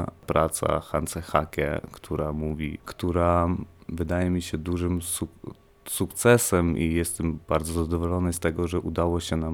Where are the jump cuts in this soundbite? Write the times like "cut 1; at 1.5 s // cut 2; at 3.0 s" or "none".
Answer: cut 1; at 2.8 s